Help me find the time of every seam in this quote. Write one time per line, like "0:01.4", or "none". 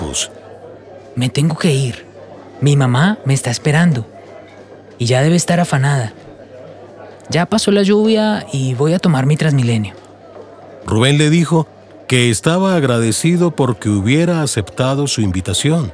none